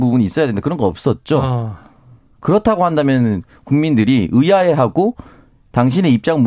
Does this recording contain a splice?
no; 0 cuts

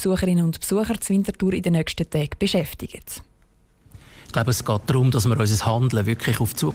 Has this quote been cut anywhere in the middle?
no; 0 cuts

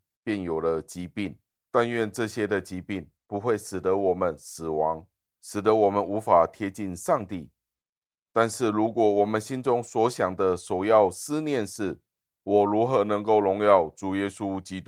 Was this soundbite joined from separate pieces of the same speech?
no; 0 cuts

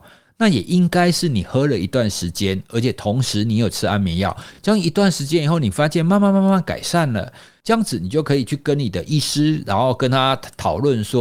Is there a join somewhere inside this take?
no; 0 cuts

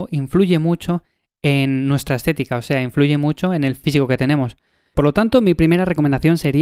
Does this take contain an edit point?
yes; 1 cut; at 4.9 s

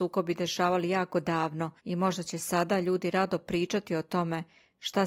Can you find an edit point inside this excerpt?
yes; 1 cut; at 1.8 s

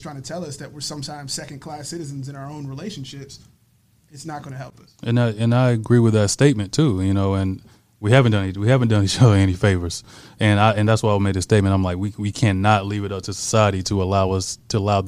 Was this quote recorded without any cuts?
yes; 0 cuts

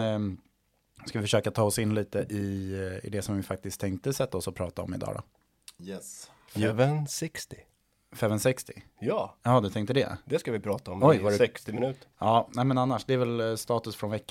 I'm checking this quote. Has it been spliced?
yes; 1 cut; at 12.1 s

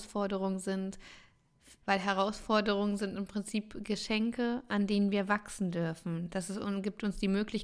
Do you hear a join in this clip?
yes; 1 cut; at 1.8 s

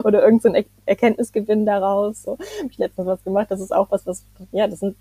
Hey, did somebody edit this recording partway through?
yes; 1 cut; at 2.3 s

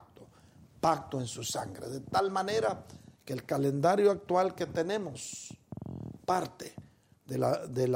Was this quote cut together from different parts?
no; 0 cuts

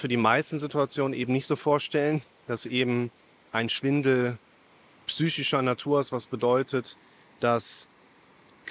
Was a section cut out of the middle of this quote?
no; 0 cuts

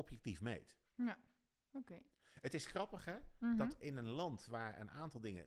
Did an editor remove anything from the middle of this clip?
no; 0 cuts

